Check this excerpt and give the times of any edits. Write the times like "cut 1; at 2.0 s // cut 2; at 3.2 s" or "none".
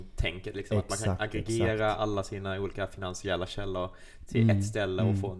none